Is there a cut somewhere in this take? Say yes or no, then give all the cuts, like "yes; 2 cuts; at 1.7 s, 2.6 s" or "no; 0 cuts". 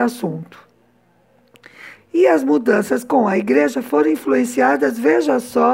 yes; 1 cut; at 1.9 s